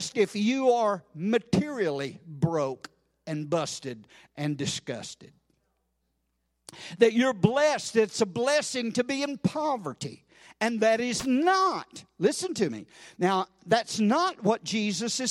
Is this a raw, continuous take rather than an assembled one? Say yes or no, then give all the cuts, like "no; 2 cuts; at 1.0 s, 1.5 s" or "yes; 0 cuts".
yes; 0 cuts